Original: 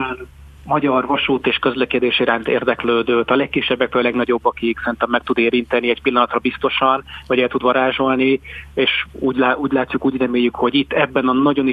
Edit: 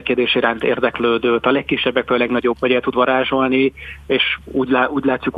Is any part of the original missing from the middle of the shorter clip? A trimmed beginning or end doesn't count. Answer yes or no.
yes